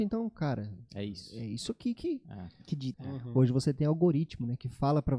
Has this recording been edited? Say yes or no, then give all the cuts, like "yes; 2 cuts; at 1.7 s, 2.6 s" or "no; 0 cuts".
yes; 1 cut; at 2.9 s